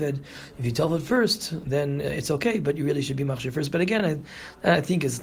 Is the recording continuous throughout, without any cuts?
yes; 0 cuts

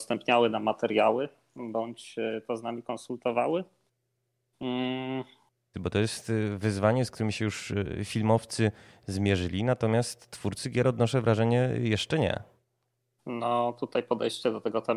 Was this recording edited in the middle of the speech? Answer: yes; 1 cut; at 5.7 s

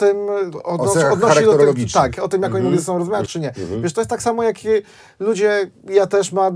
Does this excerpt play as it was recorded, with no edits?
no; 1 cut; at 3.3 s

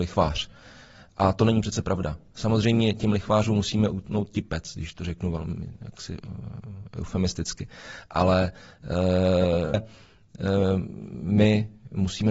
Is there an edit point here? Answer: yes; 1 cut; at 9.7 s

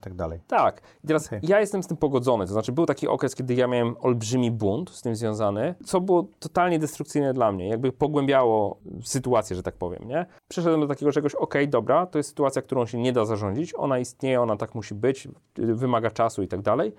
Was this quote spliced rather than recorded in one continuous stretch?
no; 0 cuts

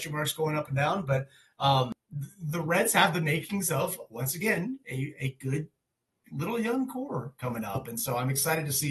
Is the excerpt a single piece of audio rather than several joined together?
yes; 0 cuts

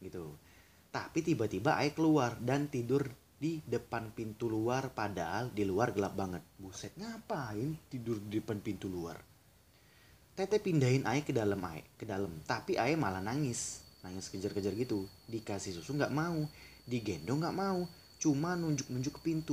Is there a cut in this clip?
no; 0 cuts

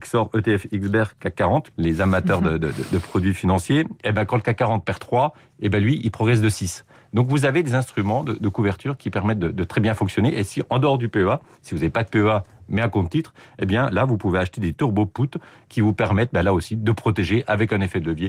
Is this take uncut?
no; 1 cut; at 1.7 s

